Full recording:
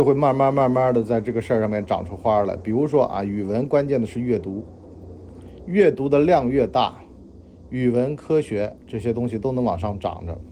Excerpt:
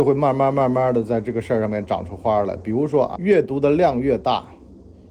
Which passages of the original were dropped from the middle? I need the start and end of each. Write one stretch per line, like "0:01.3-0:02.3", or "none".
0:03.2-0:05.6